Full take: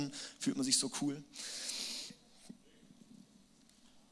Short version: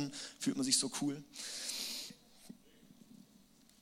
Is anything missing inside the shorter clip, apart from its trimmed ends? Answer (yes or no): no